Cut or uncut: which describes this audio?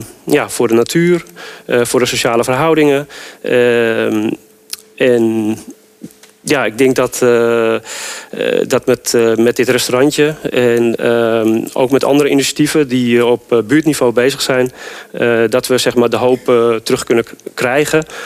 uncut